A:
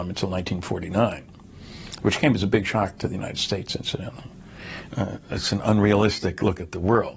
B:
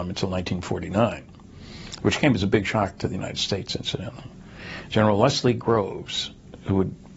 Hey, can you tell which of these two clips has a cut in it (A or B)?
A